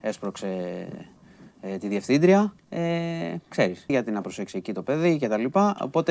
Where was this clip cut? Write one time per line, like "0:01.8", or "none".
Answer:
0:02.6
0:03.9